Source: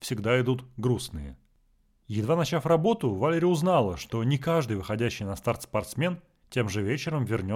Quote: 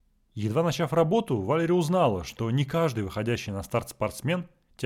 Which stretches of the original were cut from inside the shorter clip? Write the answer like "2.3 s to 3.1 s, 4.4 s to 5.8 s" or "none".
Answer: none